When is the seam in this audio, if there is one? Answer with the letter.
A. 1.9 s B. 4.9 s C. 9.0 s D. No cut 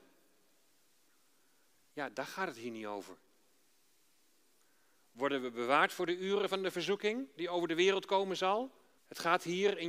C